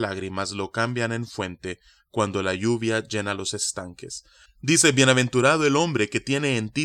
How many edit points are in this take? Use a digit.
1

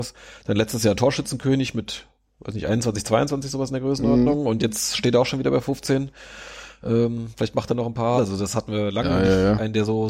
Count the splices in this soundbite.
1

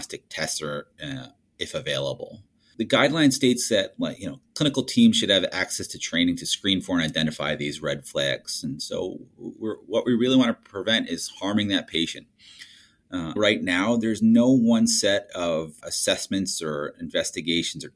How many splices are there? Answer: 2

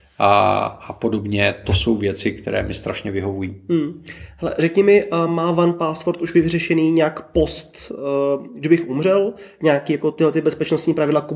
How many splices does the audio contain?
0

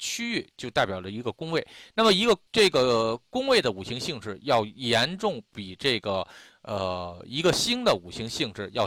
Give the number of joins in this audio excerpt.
1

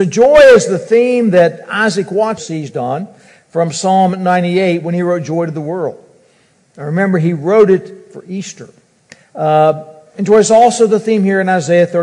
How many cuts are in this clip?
1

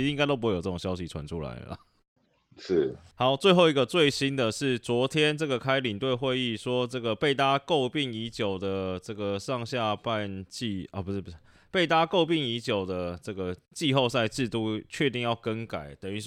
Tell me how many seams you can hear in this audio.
0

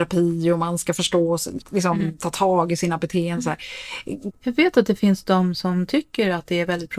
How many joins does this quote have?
2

